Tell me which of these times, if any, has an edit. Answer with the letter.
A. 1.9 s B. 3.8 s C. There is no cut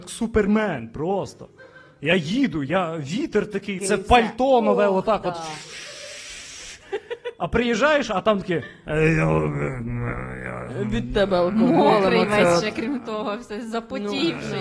B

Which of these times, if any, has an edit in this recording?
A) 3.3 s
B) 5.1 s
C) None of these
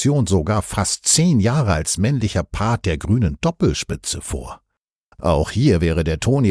B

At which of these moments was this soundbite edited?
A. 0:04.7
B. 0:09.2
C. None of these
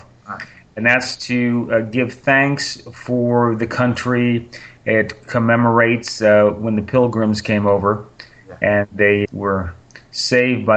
B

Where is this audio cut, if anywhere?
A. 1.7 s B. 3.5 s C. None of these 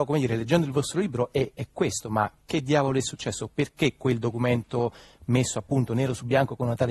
C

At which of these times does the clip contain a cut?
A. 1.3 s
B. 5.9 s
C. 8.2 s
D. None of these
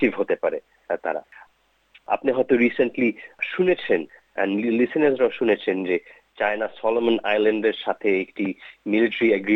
D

